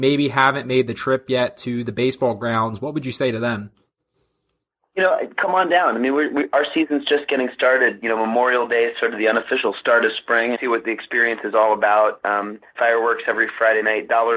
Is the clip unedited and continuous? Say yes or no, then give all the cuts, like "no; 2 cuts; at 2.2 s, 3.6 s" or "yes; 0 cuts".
no; 2 cuts; at 10.5 s, 12.8 s